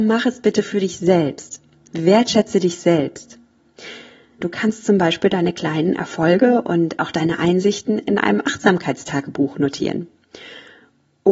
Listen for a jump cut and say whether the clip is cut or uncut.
cut